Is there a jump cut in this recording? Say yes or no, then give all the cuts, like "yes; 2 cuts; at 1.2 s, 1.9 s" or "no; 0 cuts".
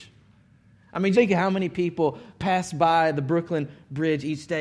yes; 1 cut; at 1.1 s